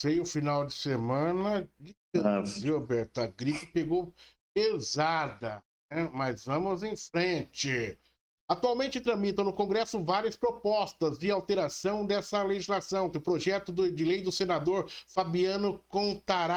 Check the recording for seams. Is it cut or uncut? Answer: cut